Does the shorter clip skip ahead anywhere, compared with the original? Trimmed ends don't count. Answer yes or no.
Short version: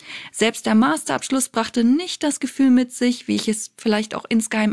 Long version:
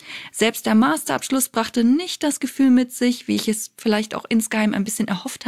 no